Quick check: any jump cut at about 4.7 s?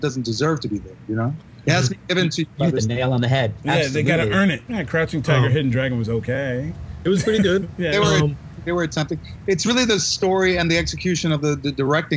yes; 1 cut; at 4.7 s

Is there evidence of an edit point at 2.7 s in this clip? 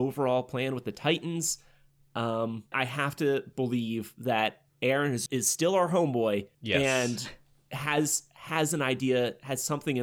yes; 3 cuts; at 2.7 s, 5.3 s, 6.5 s

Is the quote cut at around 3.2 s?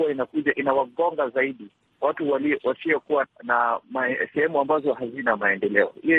yes; 1 cut; at 3.2 s

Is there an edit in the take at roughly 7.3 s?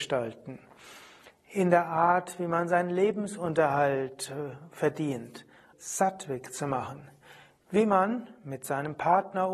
no; 1 cut; at 5.7 s

